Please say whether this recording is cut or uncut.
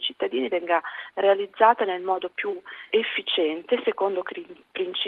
cut